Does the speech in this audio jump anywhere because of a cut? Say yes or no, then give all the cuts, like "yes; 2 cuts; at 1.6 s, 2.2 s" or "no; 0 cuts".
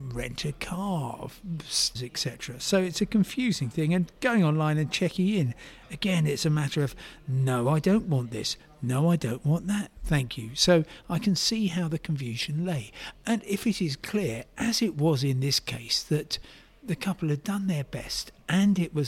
yes; 2 cuts; at 1.9 s, 13.1 s